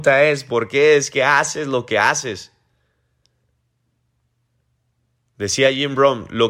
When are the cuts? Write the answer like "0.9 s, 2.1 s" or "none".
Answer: none